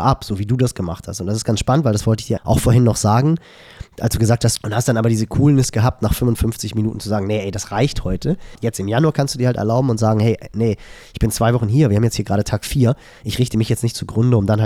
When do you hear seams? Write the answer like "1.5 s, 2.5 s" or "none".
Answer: 2.4 s, 4.6 s, 8.6 s